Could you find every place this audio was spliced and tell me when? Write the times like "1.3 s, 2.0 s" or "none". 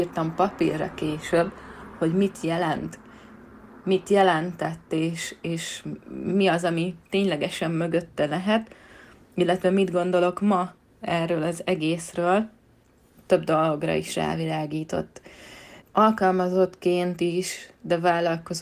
15.8 s